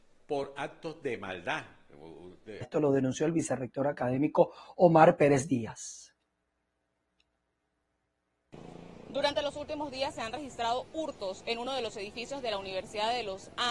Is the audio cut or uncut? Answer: cut